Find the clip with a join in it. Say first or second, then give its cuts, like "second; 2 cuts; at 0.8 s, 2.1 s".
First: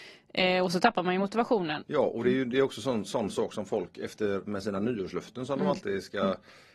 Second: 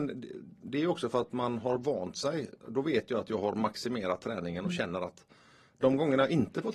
first; 1 cut; at 1.8 s